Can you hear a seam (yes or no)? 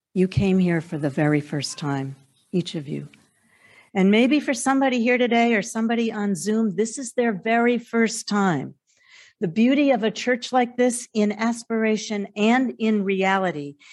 no